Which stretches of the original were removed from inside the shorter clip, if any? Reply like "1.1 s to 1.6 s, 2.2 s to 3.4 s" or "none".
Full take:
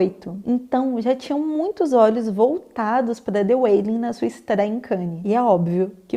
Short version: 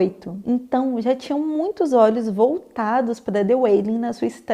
none